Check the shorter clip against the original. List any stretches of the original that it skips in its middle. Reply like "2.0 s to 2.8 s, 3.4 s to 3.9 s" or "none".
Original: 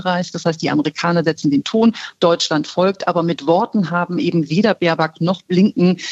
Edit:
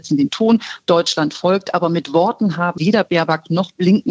4.1 s to 4.5 s